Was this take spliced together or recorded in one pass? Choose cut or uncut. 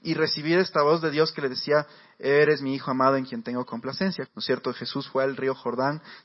cut